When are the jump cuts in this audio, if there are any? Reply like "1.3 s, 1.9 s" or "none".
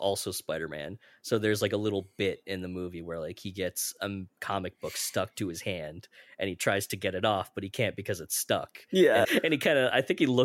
9.2 s